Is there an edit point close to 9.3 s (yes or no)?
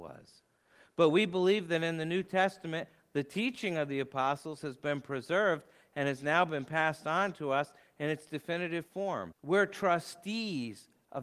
yes